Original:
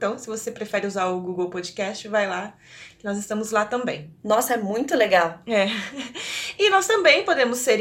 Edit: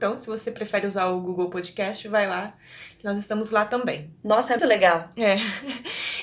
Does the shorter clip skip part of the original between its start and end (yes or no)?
yes